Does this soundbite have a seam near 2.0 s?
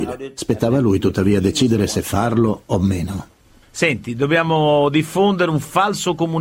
no; 1 cut; at 3.6 s

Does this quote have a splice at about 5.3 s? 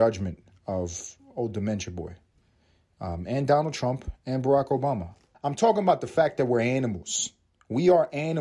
yes; 1 cut; at 5.3 s

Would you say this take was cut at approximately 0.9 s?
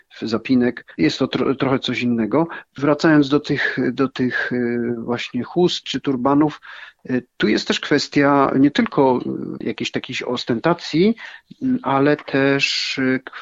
no; 1 cut; at 5.8 s

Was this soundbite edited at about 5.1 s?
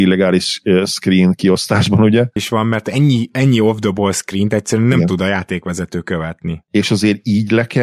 no; 2 cuts; at 2.4 s, 6.6 s

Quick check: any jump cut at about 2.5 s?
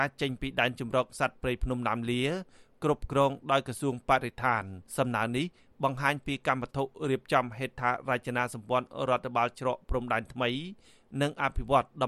no; 1 cut; at 4.9 s

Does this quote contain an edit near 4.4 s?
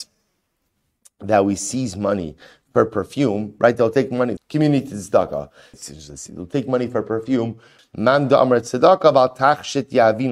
yes; 3 cuts; at 4.4 s, 5.7 s, 7.8 s

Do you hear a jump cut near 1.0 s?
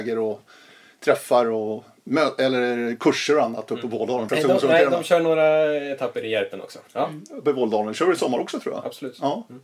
no; 2 cuts; at 4.3 s, 6.9 s

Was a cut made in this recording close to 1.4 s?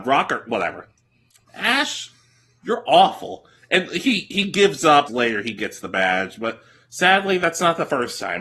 yes; 2 cuts; at 1.4 s, 5.1 s

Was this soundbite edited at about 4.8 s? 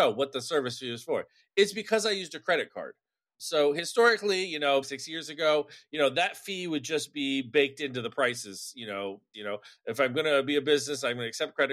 yes; 2 cuts; at 4.8 s, 9.3 s

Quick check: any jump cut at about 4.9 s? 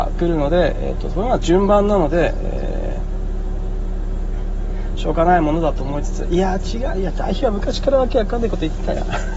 no; 0 cuts

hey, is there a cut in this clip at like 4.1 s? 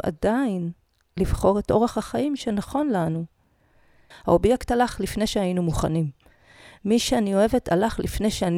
yes; 1 cut; at 4.1 s

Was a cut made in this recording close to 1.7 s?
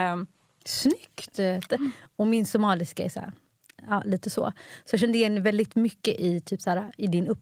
yes; 1 cut; at 1.7 s

